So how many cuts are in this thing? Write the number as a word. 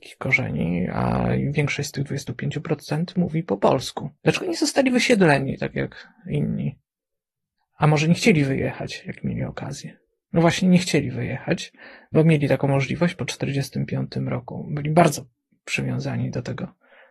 zero